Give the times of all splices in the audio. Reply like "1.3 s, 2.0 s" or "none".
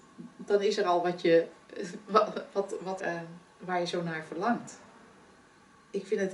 3.0 s

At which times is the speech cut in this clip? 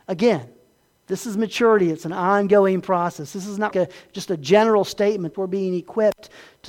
3.7 s, 5.3 s

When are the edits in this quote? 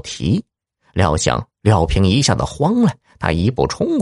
1.5 s

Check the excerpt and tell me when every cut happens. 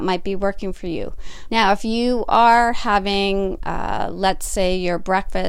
1.5 s

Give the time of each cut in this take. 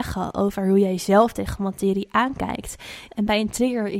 3.1 s

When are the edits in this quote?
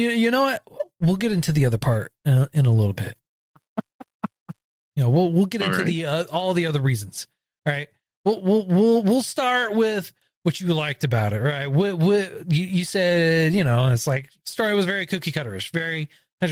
none

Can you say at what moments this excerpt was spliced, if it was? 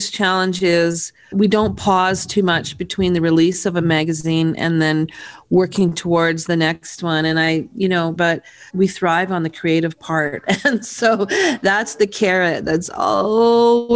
8.2 s

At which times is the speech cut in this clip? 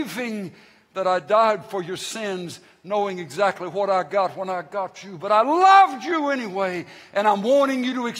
none

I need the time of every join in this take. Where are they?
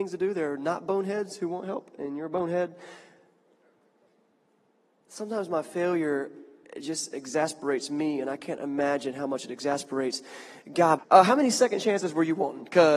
11.0 s

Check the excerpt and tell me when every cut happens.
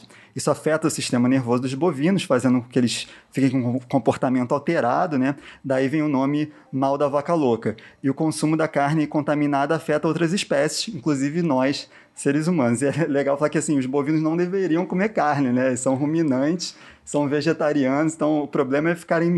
none

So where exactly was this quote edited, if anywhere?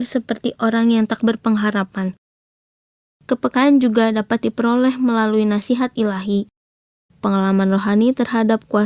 7.1 s

